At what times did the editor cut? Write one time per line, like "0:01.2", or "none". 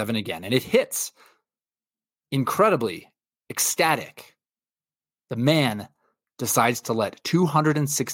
none